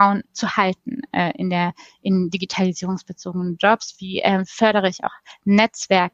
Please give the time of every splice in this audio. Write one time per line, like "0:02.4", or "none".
none